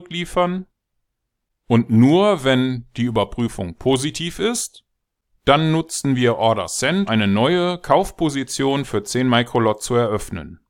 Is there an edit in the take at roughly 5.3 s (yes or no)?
no